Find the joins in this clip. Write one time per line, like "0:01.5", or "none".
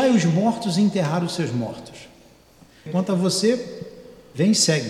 0:02.9